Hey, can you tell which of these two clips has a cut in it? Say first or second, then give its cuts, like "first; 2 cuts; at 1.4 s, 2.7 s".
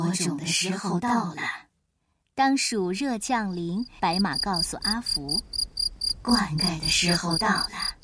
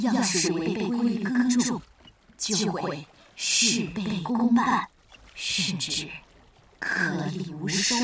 first; 1 cut; at 4.0 s